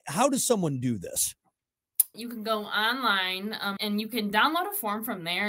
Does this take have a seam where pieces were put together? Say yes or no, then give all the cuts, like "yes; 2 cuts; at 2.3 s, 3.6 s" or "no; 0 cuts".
yes; 2 cuts; at 2.1 s, 3.8 s